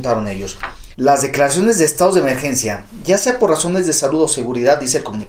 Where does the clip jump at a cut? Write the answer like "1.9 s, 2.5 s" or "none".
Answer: 0.9 s